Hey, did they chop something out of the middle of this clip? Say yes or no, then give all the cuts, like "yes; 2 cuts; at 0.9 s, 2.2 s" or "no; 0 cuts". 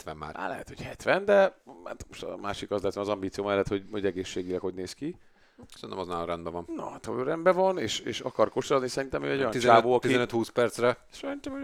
no; 0 cuts